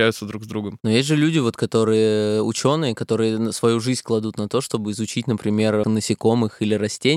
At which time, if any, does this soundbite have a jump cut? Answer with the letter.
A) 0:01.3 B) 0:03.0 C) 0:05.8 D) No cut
C